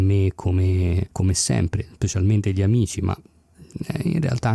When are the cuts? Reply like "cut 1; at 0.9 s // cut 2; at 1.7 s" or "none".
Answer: cut 1; at 1.1 s